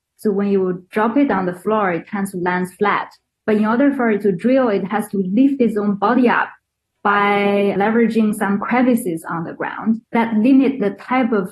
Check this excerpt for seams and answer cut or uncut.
cut